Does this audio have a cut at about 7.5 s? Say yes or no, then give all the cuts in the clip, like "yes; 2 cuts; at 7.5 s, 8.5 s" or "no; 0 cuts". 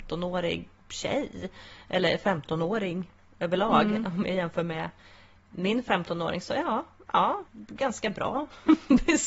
yes; 1 cut; at 7.5 s